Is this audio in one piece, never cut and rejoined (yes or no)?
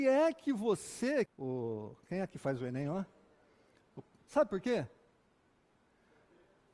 no